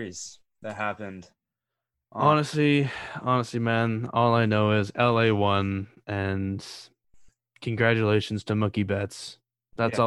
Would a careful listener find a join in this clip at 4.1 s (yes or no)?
no